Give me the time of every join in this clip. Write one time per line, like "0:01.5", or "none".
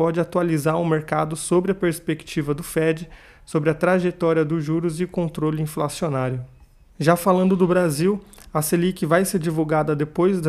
none